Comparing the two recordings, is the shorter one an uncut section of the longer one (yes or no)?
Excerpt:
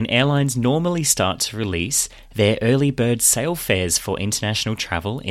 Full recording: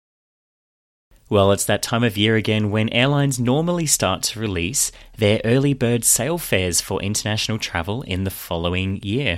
yes